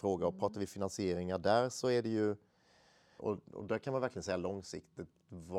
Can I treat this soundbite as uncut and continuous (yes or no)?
no